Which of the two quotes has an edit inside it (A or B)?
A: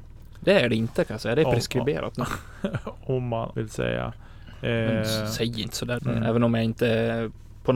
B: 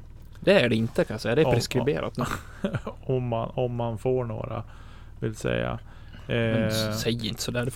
A